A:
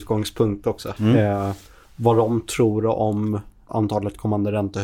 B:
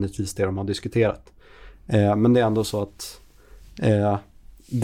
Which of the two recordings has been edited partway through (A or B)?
A